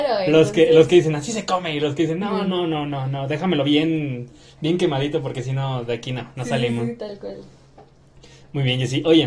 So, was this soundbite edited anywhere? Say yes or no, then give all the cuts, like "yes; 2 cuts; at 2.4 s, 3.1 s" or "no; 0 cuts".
no; 0 cuts